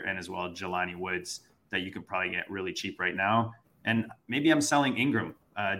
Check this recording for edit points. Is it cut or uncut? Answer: uncut